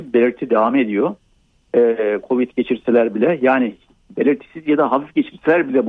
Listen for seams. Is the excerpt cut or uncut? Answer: uncut